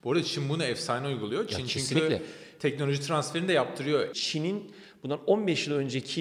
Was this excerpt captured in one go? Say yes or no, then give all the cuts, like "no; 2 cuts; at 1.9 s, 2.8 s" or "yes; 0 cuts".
no; 1 cut; at 4.1 s